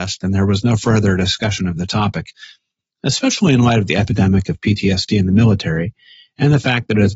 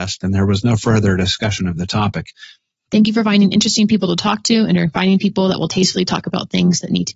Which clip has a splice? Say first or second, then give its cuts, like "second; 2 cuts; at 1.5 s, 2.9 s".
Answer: second; 1 cut; at 2.7 s